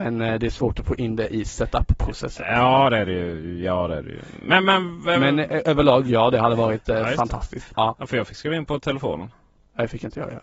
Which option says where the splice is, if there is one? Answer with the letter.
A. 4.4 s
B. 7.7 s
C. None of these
B